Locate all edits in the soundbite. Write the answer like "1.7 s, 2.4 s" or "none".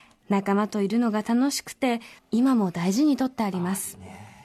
2.2 s